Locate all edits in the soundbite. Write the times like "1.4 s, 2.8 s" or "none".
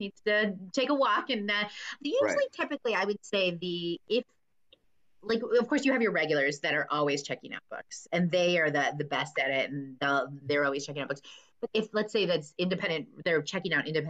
10.4 s, 11.7 s